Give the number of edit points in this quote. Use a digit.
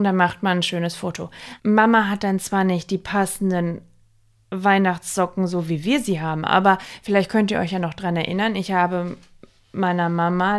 1